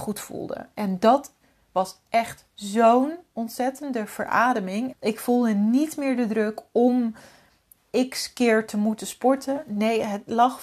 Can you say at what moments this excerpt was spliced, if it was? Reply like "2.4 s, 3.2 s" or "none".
4.9 s